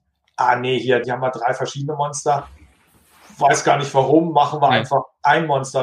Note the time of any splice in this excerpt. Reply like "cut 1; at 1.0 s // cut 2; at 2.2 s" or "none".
cut 1; at 1.0 s